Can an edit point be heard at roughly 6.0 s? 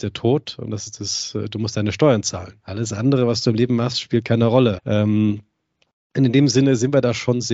no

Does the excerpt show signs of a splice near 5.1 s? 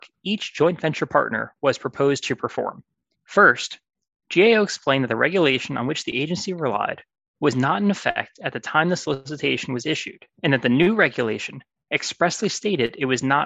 no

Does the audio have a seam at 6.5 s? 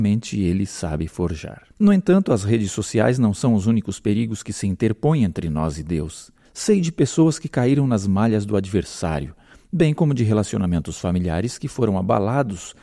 yes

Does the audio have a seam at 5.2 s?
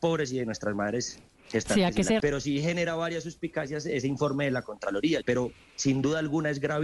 yes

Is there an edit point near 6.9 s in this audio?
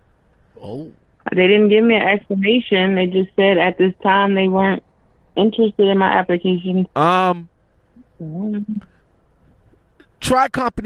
yes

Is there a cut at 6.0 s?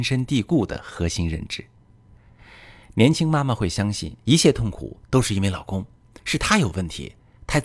no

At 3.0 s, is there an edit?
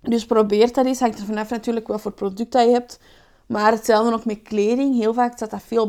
no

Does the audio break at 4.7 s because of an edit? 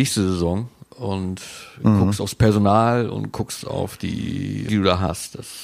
yes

